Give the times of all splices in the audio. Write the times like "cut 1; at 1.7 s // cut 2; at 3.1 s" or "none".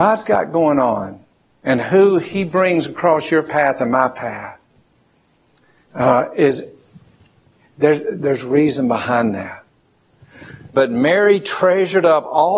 cut 1; at 8.2 s // cut 2; at 10.7 s